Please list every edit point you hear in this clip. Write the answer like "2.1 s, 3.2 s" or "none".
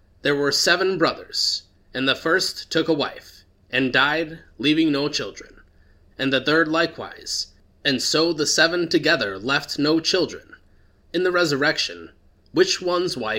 6.1 s, 11.0 s